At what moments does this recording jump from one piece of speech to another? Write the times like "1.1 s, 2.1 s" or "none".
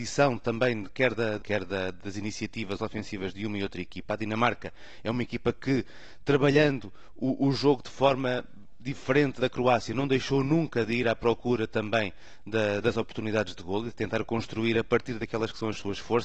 1.4 s, 9.4 s